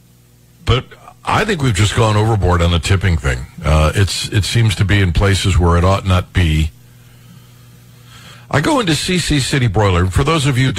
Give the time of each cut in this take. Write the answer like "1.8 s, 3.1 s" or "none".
8.3 s

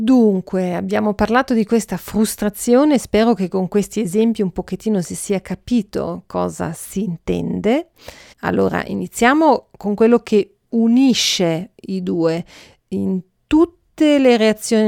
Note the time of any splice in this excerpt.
8.3 s

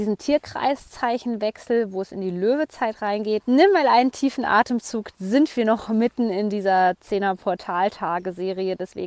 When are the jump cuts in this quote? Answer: 3.4 s, 5.1 s

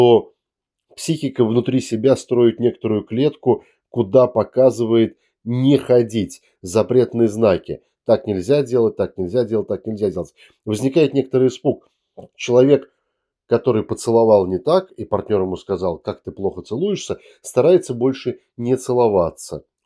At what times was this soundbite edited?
none

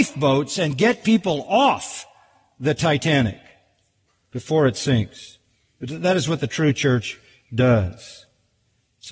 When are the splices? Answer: none

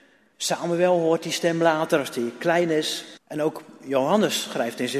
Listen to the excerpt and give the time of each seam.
3.2 s

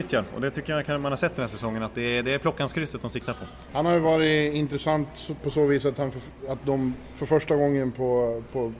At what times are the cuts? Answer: 3.7 s

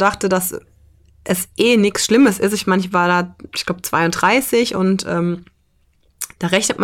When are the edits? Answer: none

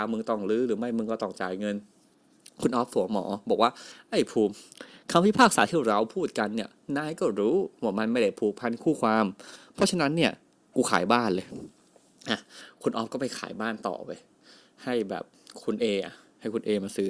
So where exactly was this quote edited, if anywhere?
none

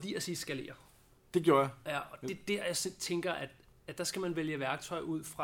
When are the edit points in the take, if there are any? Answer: none

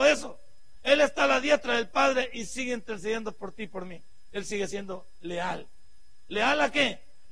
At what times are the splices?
none

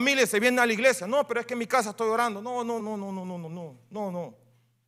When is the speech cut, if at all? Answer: 2.8 s

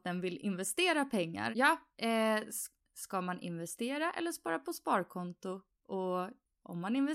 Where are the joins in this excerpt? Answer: 1.5 s

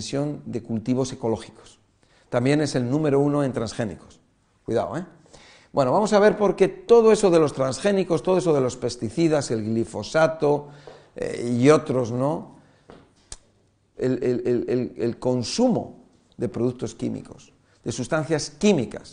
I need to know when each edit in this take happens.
13.9 s

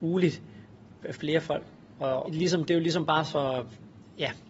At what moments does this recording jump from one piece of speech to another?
1.0 s, 2.2 s

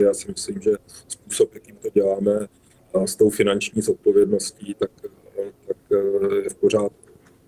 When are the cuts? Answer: none

